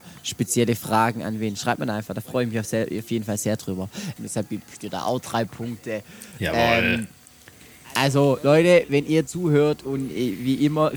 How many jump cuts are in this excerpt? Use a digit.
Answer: 1